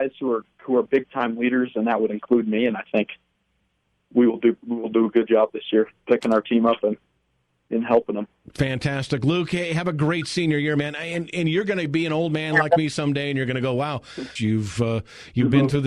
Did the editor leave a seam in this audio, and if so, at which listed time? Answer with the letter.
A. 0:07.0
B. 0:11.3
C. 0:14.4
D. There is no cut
C